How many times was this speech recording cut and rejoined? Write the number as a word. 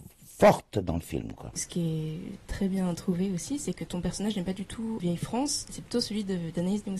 one